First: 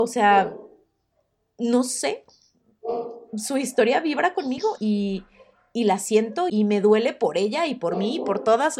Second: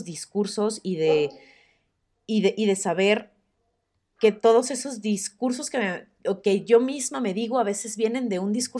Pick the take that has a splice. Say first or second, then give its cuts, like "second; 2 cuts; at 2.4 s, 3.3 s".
first; 2 cuts; at 4.8 s, 6.5 s